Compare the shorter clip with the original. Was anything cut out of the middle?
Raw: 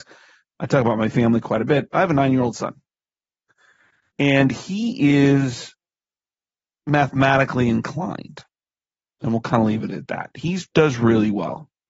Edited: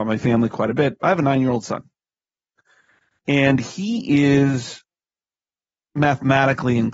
no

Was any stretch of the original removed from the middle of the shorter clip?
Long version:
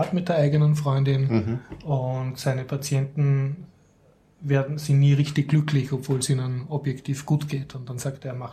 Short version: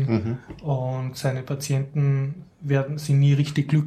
yes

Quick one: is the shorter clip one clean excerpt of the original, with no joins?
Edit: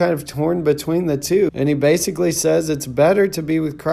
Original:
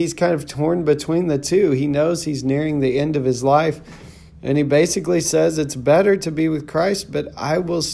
no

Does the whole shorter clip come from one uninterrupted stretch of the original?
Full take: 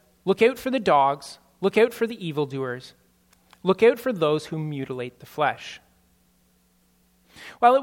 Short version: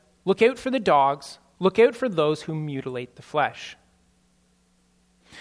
no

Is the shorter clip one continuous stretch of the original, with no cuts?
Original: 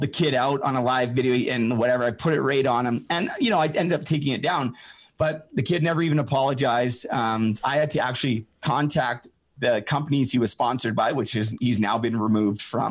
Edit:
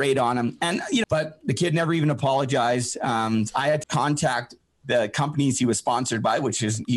no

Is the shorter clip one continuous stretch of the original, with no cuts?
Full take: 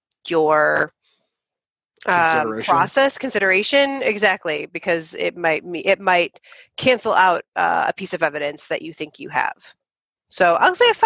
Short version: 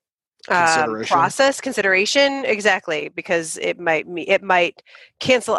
yes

